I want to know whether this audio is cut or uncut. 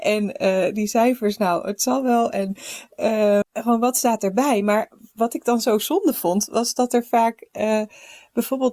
cut